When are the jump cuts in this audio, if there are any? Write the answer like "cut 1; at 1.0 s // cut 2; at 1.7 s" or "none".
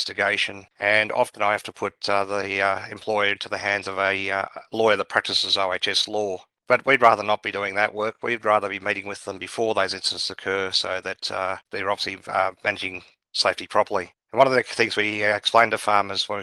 none